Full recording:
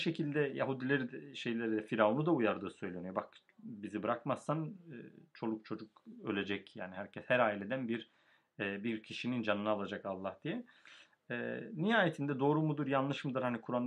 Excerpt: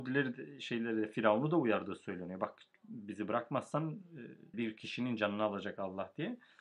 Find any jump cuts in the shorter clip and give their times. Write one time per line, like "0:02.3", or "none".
0:04.5